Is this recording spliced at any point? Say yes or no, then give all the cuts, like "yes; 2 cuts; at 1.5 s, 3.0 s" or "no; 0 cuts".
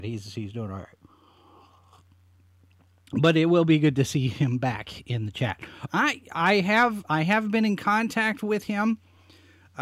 yes; 1 cut; at 5.9 s